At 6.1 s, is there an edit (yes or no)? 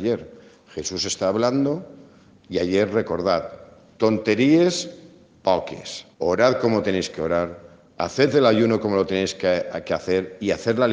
yes